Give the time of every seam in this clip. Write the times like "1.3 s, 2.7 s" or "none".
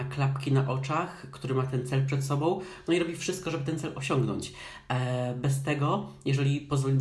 none